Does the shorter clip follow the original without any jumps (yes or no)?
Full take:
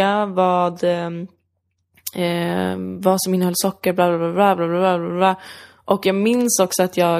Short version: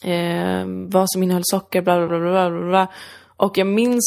no